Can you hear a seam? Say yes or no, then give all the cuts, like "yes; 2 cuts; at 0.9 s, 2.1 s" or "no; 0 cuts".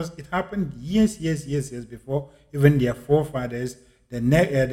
no; 0 cuts